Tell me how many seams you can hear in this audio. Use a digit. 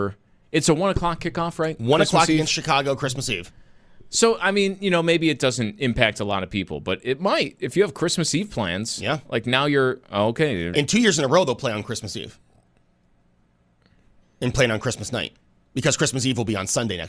2